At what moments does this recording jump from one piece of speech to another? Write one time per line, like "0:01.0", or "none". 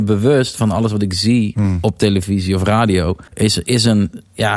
0:03.3